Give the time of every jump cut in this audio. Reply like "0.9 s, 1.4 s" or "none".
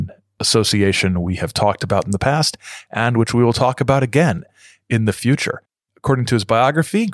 none